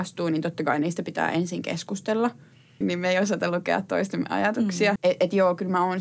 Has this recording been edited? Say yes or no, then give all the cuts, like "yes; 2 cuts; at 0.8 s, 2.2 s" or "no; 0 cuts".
yes; 2 cuts; at 2.8 s, 5.0 s